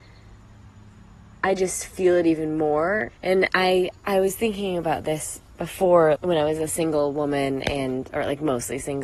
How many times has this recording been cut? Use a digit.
2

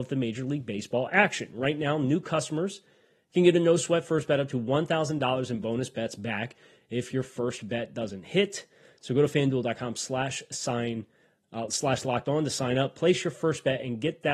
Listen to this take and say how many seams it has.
0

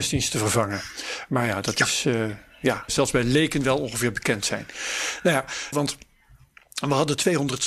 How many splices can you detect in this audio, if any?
2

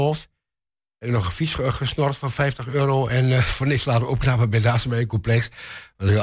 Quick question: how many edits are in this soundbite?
0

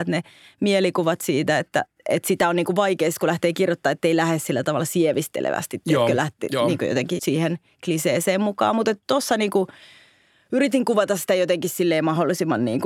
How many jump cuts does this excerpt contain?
1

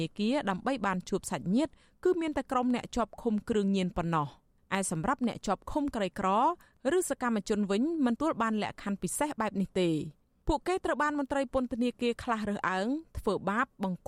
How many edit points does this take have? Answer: 1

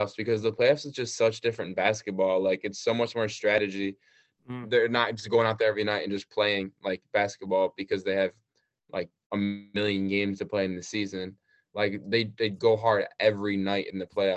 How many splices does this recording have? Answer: 0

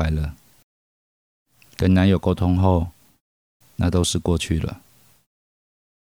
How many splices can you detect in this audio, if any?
1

